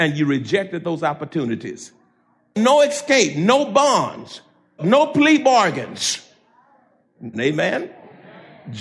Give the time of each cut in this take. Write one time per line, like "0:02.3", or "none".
0:04.8
0:07.3